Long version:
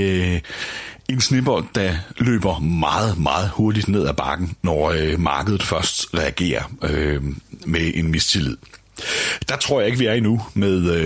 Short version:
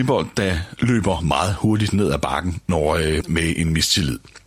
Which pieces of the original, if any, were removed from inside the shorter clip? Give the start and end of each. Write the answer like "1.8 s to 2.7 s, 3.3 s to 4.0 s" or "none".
2.6 s to 3.2 s, 5.2 s to 7.6 s